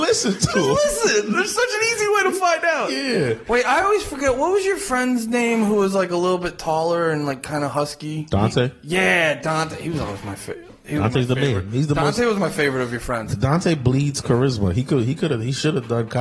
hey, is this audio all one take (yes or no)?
yes